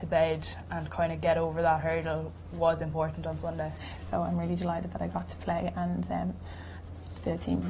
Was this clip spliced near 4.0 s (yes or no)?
yes